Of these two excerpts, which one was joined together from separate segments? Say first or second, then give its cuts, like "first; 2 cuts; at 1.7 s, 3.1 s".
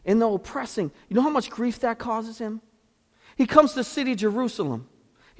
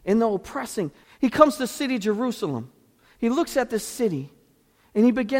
second; 1 cut; at 1.0 s